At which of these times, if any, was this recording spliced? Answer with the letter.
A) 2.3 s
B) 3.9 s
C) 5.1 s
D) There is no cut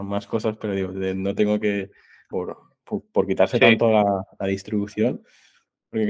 A